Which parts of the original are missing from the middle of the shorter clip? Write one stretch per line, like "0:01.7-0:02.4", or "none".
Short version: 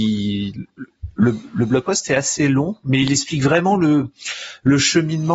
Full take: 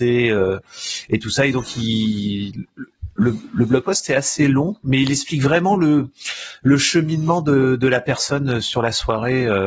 none